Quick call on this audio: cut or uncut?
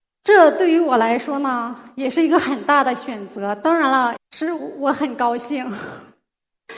cut